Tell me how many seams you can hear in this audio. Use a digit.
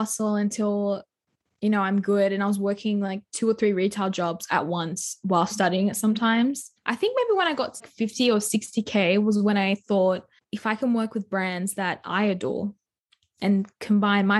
2